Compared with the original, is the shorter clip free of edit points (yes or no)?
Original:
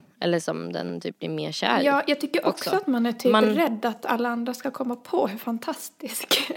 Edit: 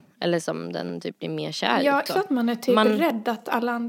no